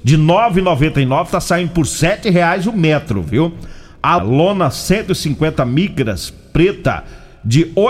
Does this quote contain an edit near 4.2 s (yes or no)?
yes